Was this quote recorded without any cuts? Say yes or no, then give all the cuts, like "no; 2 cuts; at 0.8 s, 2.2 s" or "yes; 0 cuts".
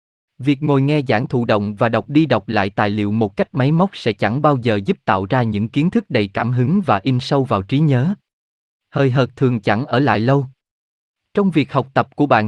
yes; 0 cuts